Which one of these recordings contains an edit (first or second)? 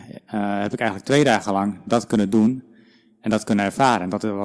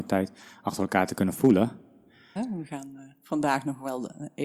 second